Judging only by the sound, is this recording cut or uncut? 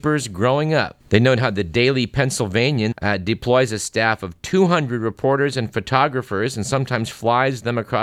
cut